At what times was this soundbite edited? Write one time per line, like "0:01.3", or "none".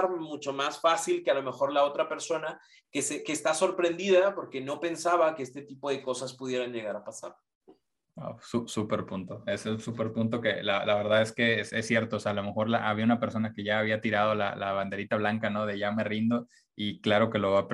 none